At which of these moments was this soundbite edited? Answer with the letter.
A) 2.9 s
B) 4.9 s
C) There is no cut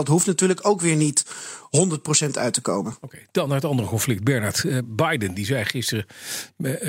C